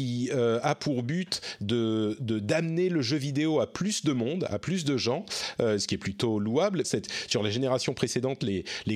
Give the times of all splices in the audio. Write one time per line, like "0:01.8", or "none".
0:06.8